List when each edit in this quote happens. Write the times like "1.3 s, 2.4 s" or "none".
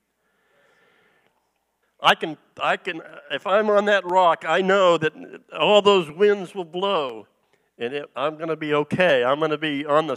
1.8 s